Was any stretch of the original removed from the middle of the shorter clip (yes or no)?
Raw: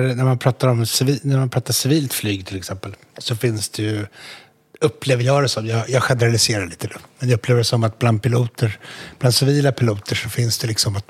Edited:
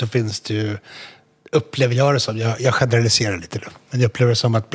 no